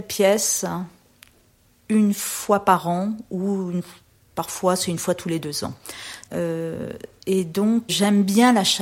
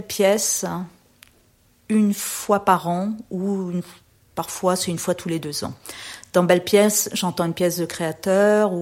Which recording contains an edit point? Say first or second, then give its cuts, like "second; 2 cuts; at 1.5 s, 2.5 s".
first; 2 cuts; at 6.3 s, 7.9 s